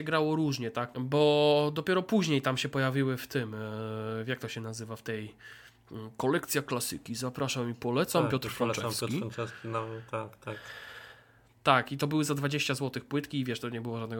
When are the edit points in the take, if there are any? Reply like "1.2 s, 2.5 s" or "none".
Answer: 0.9 s